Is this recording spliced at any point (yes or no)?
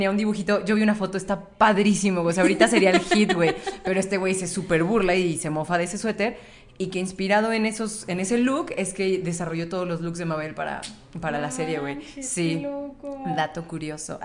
no